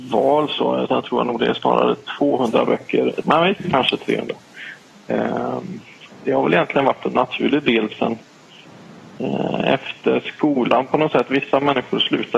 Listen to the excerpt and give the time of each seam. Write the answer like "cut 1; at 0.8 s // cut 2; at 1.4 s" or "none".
cut 1; at 3.2 s